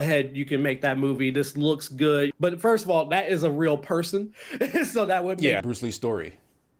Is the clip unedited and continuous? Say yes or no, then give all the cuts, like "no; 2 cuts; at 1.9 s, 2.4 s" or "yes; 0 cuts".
no; 2 cuts; at 2.3 s, 5.6 s